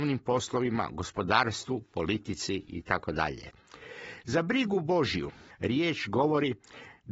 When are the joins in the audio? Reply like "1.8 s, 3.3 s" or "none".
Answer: none

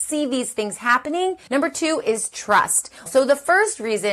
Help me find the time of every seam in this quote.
1.5 s, 3.1 s

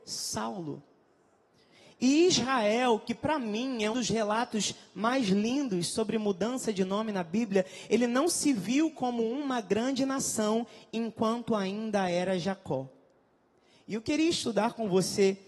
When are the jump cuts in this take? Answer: 3.9 s

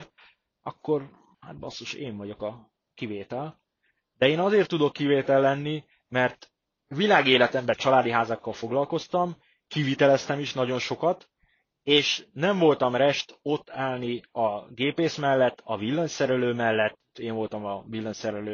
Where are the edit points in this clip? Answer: 17.1 s

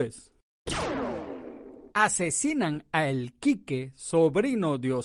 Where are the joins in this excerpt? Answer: 1.9 s

